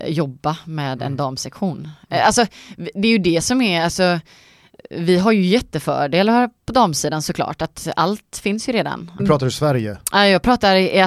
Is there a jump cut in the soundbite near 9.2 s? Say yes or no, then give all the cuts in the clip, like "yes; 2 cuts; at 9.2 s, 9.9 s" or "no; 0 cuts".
yes; 1 cut; at 9.2 s